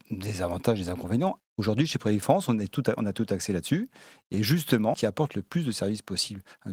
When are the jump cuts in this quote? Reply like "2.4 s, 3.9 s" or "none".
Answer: 1.4 s, 4.9 s